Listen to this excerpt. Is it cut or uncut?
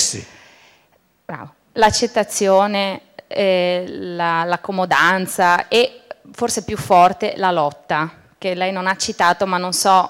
uncut